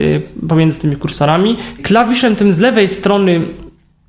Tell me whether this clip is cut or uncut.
cut